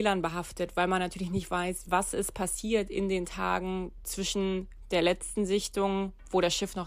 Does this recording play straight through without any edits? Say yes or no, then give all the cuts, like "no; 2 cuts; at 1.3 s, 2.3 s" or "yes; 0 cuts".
no; 1 cut; at 1.9 s